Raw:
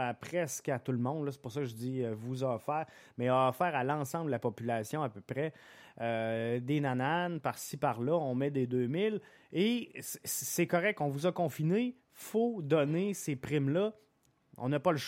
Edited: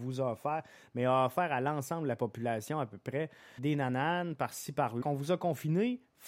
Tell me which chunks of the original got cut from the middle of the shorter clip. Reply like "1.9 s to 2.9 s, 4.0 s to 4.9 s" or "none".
5.8 s to 6.6 s, 8.1 s to 11.0 s